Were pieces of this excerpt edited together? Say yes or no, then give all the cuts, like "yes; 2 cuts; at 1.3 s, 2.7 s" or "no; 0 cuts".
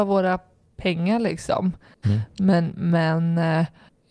yes; 1 cut; at 2.0 s